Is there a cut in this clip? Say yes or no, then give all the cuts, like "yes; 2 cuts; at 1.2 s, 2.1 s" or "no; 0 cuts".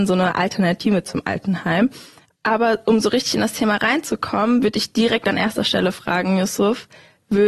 no; 0 cuts